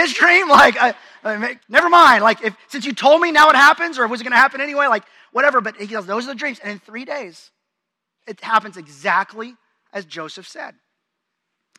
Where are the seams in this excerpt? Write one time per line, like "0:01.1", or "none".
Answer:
0:01.6